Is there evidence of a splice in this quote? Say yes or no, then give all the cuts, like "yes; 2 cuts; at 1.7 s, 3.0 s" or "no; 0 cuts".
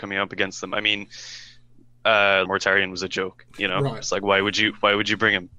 yes; 1 cut; at 2.4 s